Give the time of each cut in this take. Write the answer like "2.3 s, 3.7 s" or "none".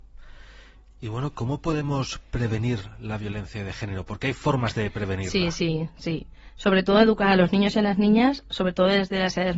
none